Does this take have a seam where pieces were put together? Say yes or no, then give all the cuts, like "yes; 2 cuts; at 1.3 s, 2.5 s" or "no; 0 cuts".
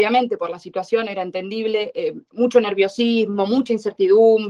no; 0 cuts